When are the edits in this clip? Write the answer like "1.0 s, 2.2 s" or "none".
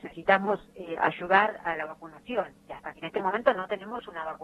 3.0 s